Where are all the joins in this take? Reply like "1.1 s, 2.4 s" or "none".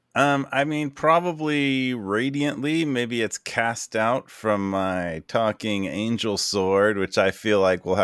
none